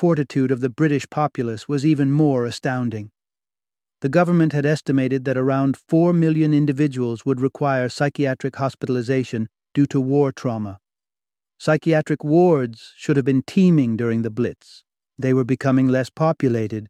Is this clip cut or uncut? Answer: cut